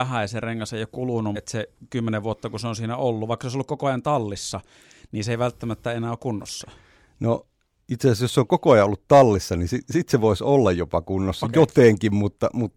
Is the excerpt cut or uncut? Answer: cut